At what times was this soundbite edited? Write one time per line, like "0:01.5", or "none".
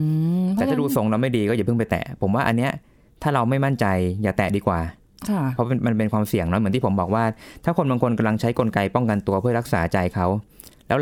none